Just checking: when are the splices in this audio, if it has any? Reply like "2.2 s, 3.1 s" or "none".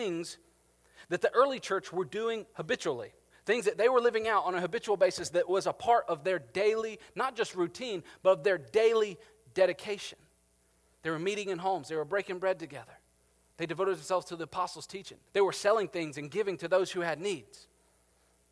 13.5 s, 15.3 s